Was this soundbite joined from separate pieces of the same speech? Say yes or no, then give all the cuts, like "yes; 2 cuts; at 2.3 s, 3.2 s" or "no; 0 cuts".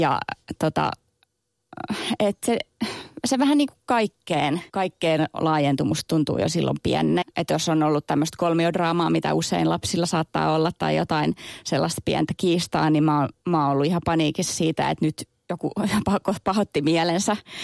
yes; 2 cuts; at 4.7 s, 7.2 s